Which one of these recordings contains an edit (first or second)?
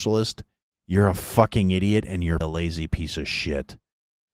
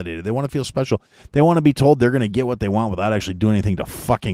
first